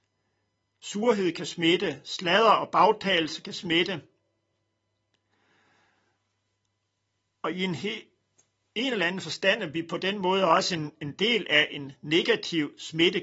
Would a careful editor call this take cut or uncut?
uncut